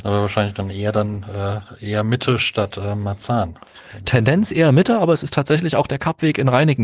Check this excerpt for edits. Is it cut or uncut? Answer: uncut